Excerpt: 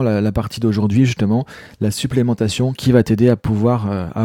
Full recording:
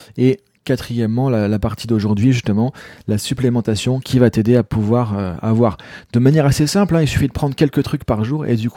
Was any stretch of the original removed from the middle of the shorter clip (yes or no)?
no